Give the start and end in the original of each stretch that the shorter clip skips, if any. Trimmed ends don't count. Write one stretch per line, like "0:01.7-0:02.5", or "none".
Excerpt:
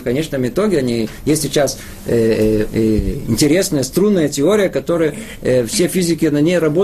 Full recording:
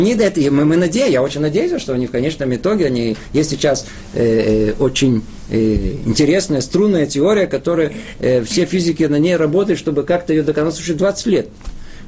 0:04.8-0:05.5